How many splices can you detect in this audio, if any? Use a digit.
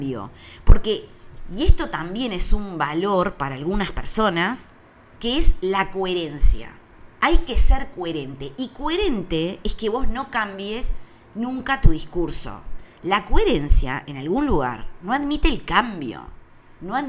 1